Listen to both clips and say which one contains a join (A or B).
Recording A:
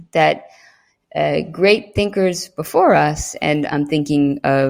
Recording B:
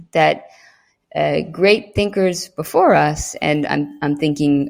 A